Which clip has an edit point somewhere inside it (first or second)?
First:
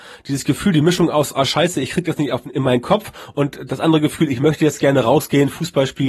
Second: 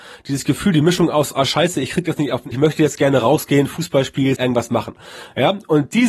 second